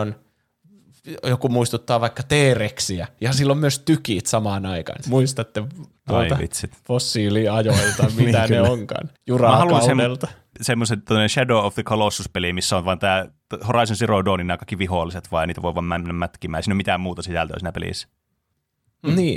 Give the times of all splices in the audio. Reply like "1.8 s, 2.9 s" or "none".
5.0 s, 9.2 s, 10.5 s